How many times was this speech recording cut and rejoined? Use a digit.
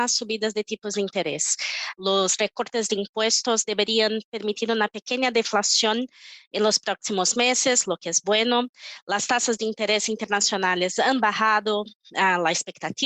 1